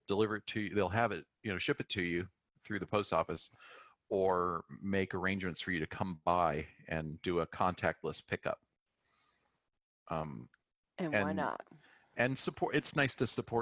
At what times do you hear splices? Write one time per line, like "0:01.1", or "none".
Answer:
none